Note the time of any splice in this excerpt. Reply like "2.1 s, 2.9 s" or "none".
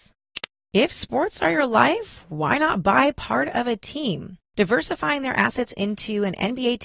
4.4 s